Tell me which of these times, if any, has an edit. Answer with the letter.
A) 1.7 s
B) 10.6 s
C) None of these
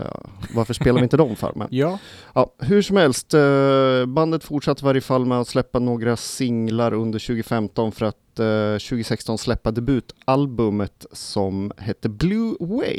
C